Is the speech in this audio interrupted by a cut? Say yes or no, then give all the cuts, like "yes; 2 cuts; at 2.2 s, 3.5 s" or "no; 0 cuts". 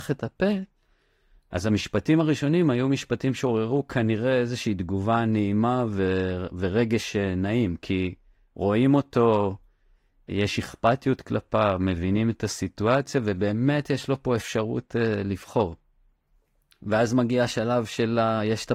yes; 1 cut; at 10.3 s